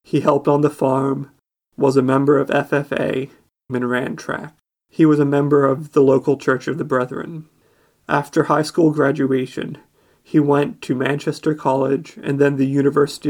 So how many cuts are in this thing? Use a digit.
1